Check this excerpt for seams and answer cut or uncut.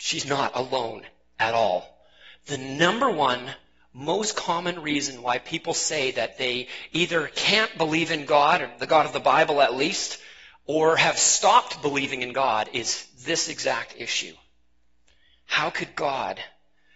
uncut